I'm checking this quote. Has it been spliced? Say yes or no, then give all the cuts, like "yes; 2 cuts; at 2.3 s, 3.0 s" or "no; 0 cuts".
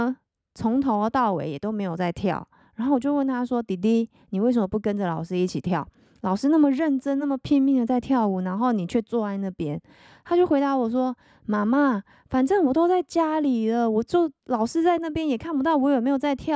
no; 0 cuts